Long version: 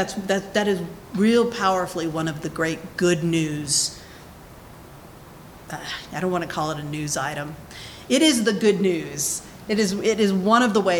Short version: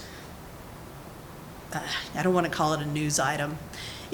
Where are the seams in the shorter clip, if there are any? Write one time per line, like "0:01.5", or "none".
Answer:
none